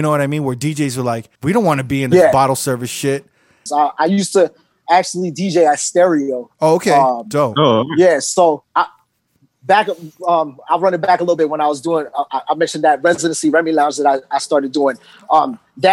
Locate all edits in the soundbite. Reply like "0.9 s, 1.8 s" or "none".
1.4 s, 3.7 s